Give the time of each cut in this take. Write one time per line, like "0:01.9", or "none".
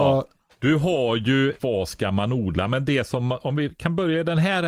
0:01.6

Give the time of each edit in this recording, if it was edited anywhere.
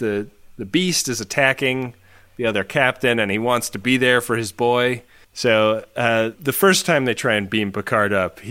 0:05.2
0:06.3

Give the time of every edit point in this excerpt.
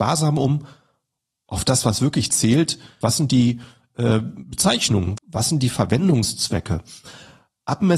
0:03.0
0:05.2

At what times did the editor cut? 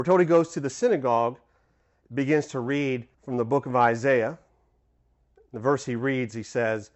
0:02.1
0:03.1

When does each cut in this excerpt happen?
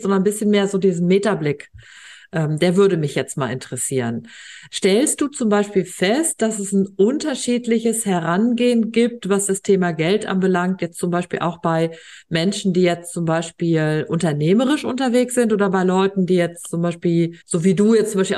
0:17.4

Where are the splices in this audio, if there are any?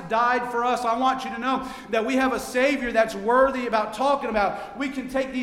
none

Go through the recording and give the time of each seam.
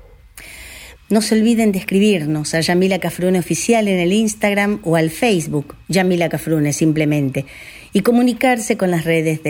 0:00.9

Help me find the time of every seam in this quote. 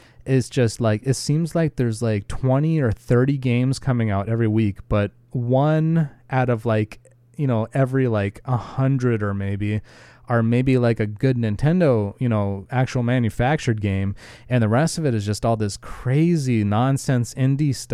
none

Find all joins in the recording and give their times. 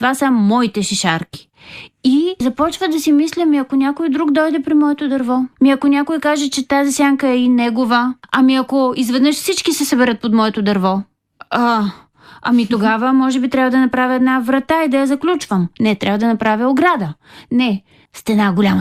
none

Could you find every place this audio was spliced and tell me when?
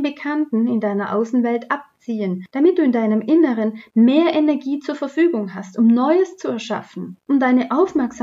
0:07.2

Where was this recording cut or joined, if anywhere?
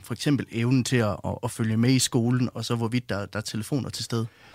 0:01.4

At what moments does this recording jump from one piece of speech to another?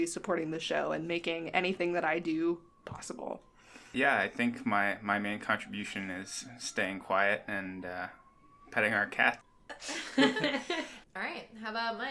0:09.4

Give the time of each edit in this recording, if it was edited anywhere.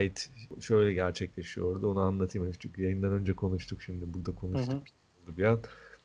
none

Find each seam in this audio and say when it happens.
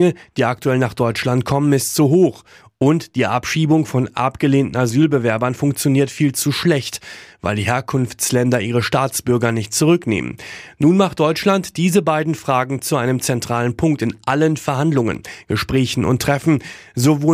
none

